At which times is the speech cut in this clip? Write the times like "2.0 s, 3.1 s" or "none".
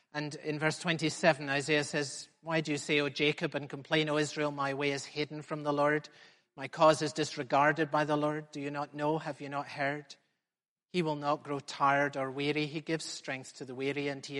none